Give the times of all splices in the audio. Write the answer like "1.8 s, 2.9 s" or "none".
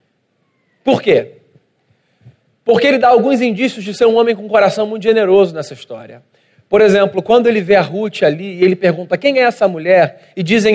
none